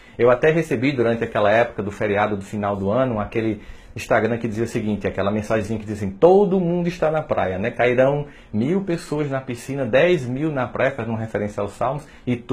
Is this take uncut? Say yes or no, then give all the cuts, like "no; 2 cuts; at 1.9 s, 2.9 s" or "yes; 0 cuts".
yes; 0 cuts